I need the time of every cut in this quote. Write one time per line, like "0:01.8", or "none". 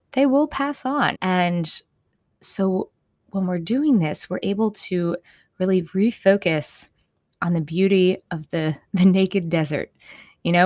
0:01.1